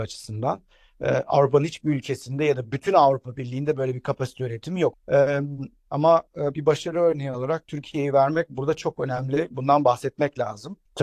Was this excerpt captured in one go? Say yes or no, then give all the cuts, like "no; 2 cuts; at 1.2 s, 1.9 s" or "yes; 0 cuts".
no; 1 cut; at 4.9 s